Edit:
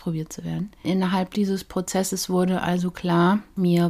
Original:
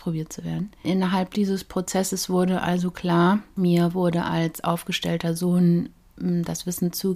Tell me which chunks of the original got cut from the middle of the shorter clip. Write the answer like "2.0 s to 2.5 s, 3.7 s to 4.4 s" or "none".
none